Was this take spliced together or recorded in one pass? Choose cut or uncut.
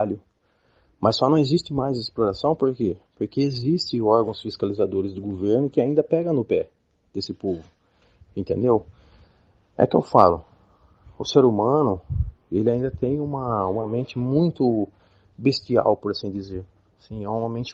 uncut